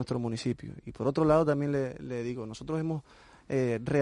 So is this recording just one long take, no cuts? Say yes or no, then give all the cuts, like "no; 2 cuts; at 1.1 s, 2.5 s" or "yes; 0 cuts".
yes; 0 cuts